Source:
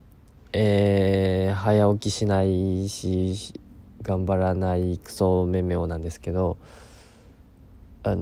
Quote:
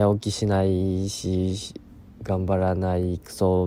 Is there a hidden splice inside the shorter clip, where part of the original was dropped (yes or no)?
no